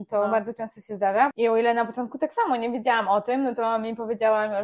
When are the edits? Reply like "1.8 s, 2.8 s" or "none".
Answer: 1.3 s